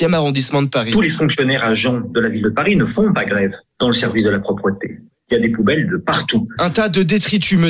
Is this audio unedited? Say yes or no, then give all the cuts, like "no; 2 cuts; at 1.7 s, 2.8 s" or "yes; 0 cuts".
no; 1 cut; at 6.6 s